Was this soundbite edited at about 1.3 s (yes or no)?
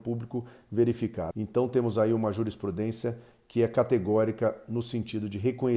yes